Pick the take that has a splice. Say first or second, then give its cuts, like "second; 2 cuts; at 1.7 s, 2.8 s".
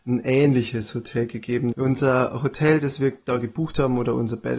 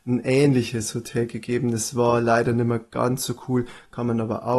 first; 1 cut; at 1.7 s